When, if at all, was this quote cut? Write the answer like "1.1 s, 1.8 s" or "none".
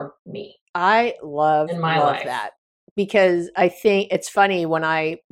none